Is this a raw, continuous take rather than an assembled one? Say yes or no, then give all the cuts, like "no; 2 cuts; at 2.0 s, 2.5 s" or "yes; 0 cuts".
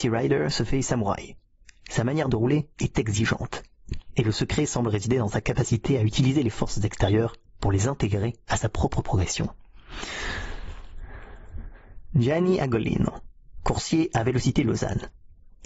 yes; 0 cuts